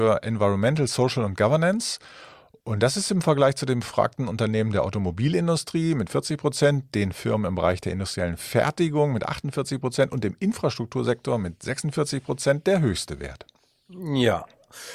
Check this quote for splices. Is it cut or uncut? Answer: uncut